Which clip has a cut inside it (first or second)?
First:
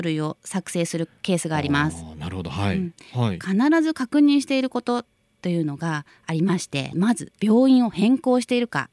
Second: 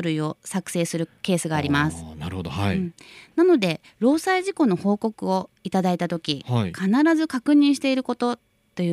first